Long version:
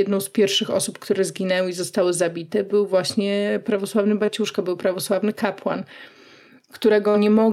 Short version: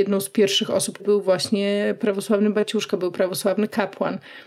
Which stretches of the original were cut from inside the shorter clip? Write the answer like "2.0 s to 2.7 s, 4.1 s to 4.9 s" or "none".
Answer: 1.0 s to 2.6 s